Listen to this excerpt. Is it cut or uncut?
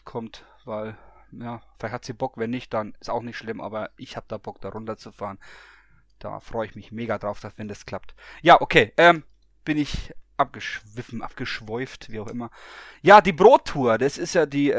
uncut